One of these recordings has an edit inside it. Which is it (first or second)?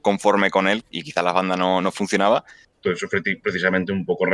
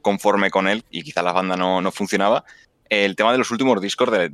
first